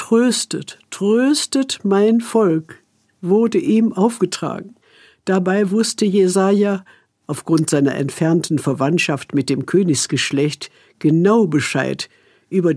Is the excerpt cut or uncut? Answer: uncut